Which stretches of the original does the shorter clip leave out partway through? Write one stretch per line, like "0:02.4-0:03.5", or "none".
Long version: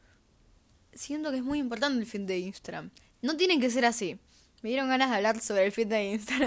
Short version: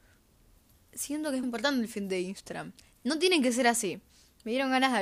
0:01.4-0:01.6